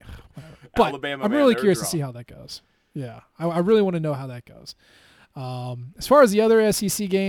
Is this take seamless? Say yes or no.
yes